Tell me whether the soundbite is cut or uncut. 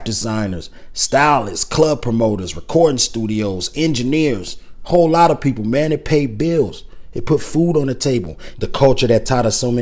cut